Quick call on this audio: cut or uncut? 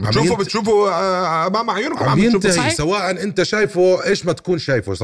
uncut